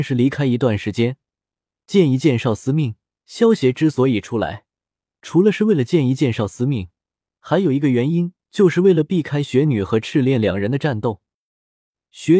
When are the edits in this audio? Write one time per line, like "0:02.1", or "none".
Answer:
0:03.2